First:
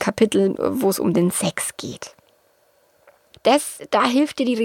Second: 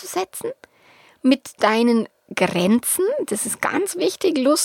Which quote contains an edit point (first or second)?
first